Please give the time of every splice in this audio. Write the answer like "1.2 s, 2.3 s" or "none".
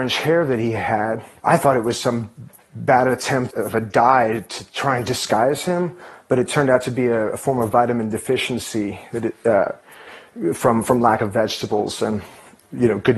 1.4 s, 3.5 s